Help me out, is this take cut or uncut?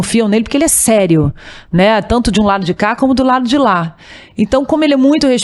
uncut